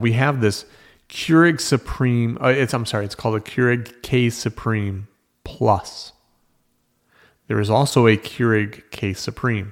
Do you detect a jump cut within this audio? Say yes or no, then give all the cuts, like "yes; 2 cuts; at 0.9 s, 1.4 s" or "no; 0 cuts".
no; 0 cuts